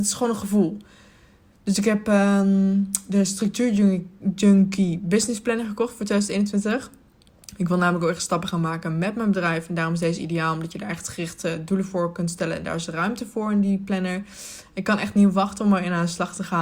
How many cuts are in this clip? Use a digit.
0